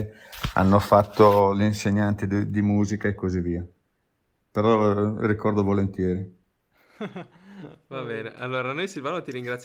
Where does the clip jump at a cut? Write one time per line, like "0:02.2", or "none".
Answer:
none